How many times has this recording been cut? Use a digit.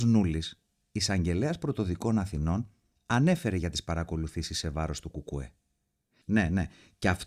1